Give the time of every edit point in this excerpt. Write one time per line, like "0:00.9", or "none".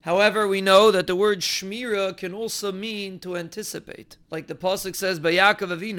0:04.2